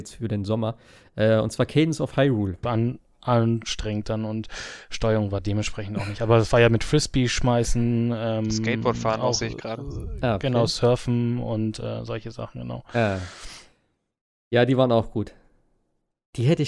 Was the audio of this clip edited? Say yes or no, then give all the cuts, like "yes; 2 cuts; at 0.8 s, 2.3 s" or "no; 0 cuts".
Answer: yes; 1 cut; at 2.6 s